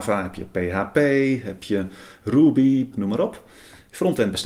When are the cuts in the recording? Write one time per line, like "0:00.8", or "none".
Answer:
0:02.9